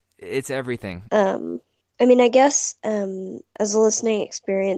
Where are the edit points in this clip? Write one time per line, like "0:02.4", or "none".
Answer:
0:01.1